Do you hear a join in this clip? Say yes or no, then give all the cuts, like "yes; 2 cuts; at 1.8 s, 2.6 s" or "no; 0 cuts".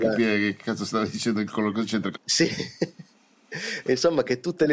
yes; 1 cut; at 2.2 s